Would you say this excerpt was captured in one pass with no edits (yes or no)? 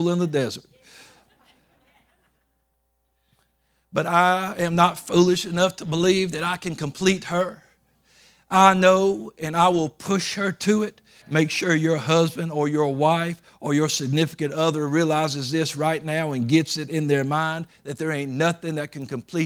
no